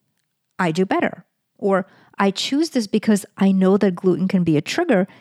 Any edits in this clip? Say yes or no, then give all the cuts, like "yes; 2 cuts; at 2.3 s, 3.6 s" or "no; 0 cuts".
no; 0 cuts